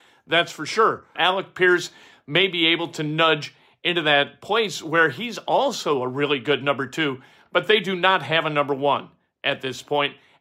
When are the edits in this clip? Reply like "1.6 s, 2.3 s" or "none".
1.2 s